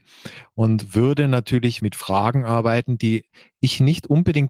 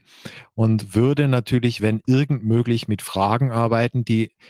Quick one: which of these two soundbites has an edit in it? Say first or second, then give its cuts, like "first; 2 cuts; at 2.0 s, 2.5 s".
first; 1 cut; at 1.8 s